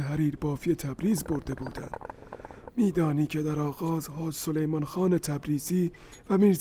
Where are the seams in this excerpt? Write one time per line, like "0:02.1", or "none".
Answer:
0:02.7